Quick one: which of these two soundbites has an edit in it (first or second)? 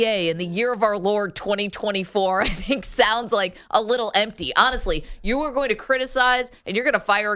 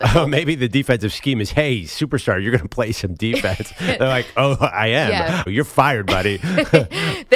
second